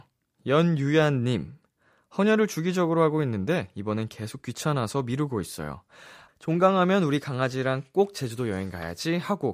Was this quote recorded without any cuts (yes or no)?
no